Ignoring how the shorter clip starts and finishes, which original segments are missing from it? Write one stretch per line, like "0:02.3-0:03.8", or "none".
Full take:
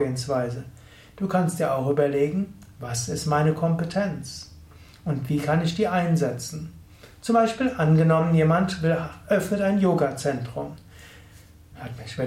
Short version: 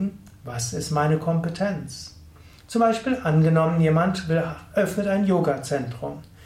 0:05.0-0:07.1